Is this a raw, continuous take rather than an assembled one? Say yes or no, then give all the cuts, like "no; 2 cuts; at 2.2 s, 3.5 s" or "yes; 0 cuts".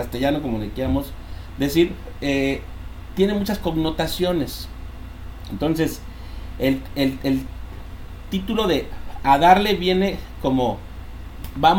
yes; 0 cuts